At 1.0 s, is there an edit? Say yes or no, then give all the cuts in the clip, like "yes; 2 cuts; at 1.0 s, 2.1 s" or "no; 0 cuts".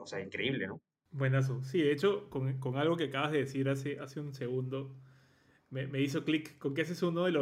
no; 0 cuts